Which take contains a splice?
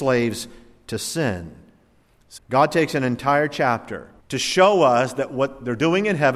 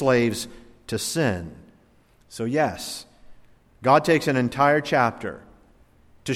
first; 2 cuts; at 2.4 s, 4.2 s

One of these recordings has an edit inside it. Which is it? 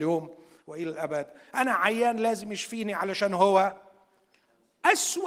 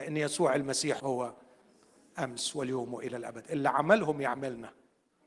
second; 1 cut; at 1.0 s

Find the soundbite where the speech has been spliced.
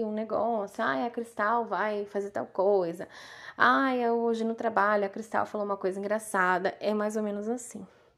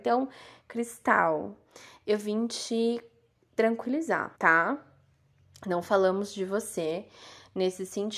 second; 1 cut; at 4.3 s

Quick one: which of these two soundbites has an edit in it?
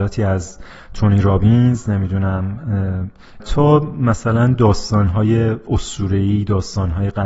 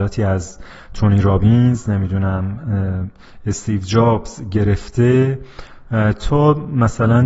first; 1 cut; at 3.4 s

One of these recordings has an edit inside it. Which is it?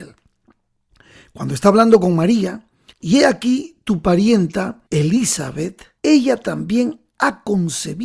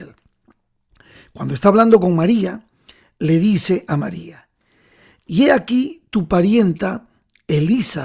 first; 3 cuts; at 2.9 s, 4.9 s, 6.0 s

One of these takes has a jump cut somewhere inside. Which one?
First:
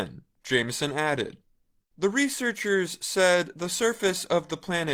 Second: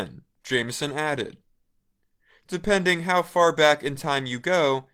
first; 1 cut; at 1.8 s

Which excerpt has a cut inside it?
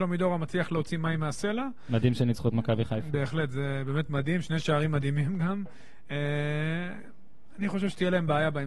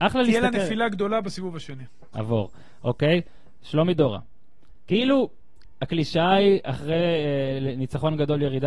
second; 1 cut; at 2.1 s

